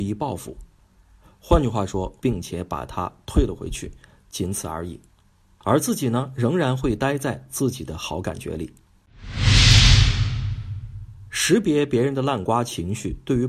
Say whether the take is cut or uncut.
cut